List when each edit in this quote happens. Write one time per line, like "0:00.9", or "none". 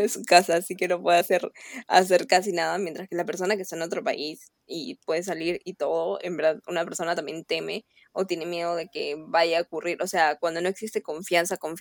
none